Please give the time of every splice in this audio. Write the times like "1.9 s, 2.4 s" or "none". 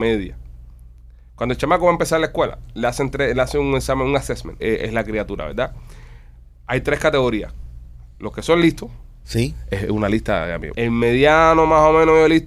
4.6 s, 9.2 s, 10.7 s